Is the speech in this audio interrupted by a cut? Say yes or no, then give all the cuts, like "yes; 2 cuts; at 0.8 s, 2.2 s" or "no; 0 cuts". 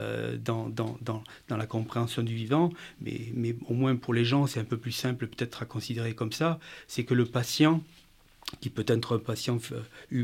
no; 0 cuts